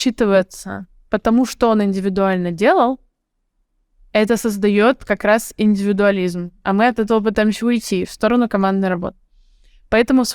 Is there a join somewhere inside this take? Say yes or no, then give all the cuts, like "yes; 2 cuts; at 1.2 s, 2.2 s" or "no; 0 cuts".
no; 0 cuts